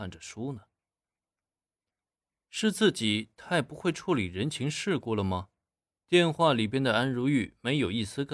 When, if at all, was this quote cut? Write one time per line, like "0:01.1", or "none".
0:06.0